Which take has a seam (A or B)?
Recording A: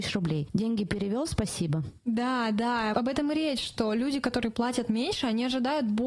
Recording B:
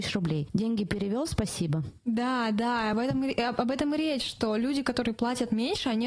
A